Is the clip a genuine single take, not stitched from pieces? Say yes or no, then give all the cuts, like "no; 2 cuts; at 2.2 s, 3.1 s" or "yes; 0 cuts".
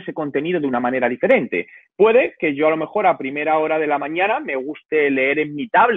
yes; 0 cuts